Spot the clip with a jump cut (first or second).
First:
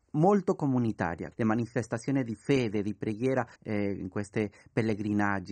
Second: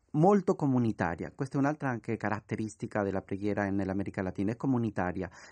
first